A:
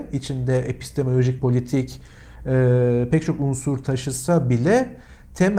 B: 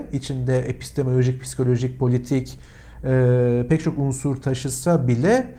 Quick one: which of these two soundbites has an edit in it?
A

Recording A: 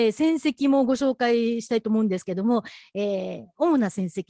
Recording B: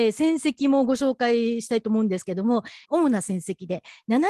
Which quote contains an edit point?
B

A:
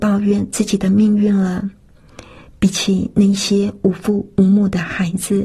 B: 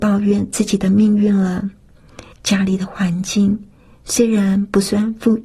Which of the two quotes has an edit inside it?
B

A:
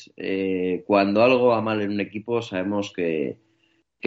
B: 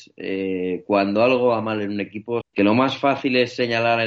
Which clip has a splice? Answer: B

